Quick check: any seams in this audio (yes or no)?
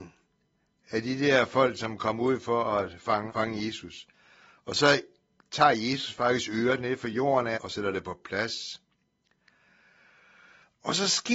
yes